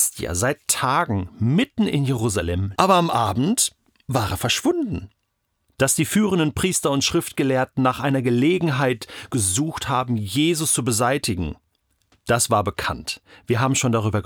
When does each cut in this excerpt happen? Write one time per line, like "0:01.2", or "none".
0:02.7
0:05.6